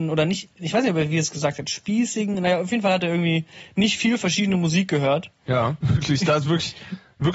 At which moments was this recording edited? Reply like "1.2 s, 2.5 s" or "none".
5.8 s